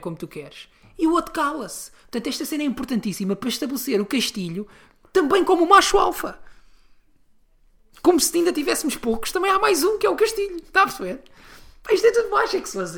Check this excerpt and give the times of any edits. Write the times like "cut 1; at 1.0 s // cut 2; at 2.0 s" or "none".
none